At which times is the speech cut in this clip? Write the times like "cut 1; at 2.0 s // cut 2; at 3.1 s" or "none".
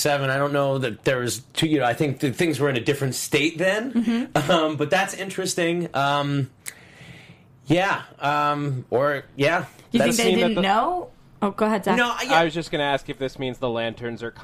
none

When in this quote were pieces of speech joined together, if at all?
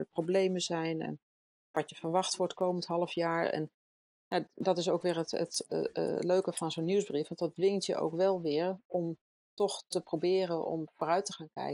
cut 1; at 4.5 s

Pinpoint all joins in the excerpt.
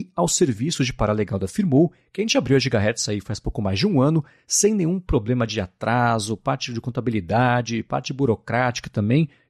none

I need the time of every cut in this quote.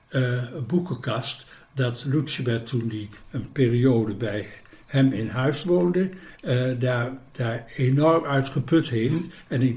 none

